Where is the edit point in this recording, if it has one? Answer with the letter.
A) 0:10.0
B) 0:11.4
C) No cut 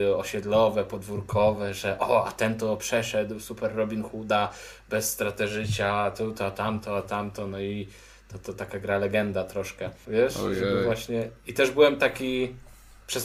A